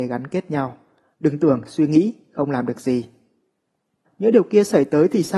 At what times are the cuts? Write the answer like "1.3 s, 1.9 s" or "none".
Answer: 1.1 s, 4.0 s

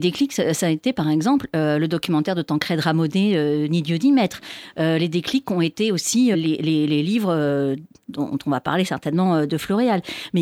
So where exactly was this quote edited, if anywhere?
6.3 s

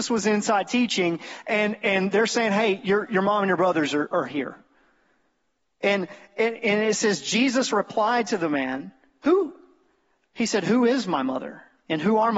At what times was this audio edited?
3.1 s, 10.3 s

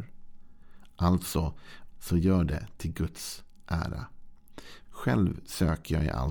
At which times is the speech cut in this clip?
1.9 s, 4.8 s

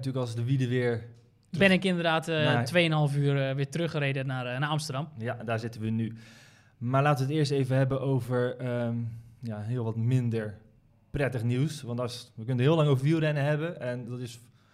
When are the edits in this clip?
none

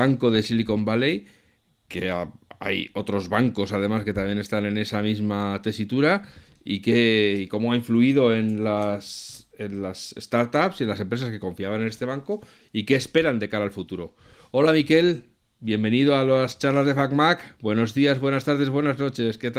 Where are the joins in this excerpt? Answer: none

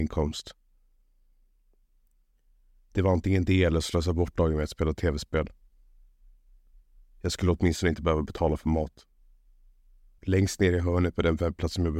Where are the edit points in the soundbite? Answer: 10.2 s

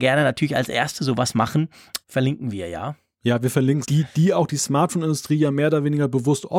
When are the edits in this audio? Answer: 2.0 s, 3.8 s

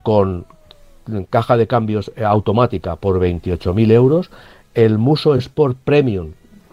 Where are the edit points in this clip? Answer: none

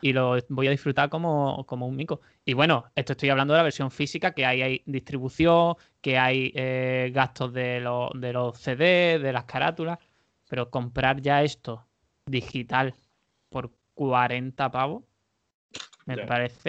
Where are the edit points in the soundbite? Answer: none

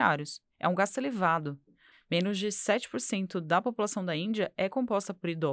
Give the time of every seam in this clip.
1.9 s

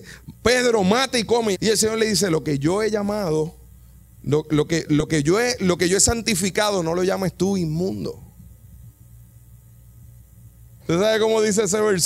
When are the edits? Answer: 1.5 s, 10.8 s

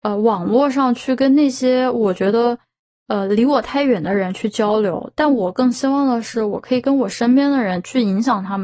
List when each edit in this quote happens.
none

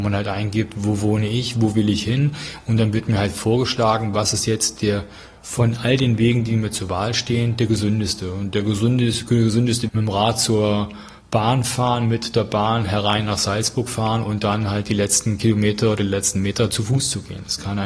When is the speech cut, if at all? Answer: 9.9 s

